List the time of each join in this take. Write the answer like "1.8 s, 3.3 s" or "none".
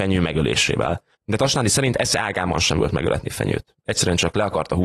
1.1 s